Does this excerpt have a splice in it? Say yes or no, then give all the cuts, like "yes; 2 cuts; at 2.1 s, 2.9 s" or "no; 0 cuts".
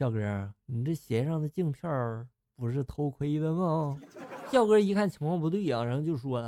no; 0 cuts